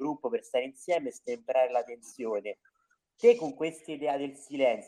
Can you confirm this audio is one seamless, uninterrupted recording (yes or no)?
yes